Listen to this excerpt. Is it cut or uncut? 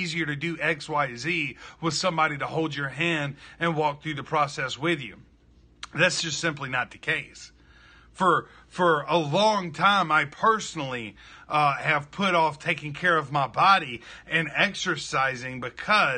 uncut